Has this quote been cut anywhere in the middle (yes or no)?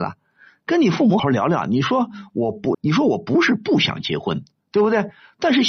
yes